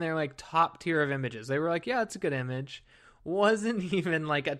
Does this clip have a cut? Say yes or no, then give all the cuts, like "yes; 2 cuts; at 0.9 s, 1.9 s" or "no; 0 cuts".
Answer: no; 0 cuts